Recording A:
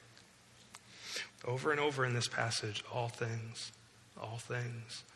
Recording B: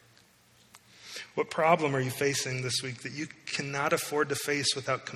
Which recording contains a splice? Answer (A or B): A